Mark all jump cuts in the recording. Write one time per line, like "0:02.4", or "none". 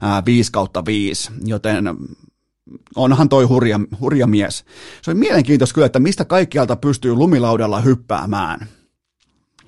none